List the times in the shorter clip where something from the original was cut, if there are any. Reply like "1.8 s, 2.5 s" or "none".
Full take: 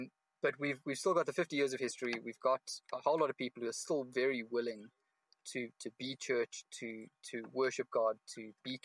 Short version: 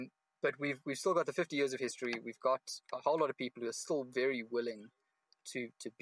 none